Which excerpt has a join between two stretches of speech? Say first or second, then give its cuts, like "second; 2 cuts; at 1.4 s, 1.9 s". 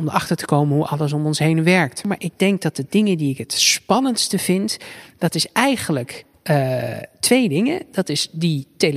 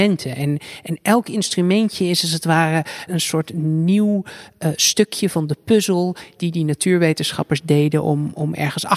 second; 1 cut; at 3.1 s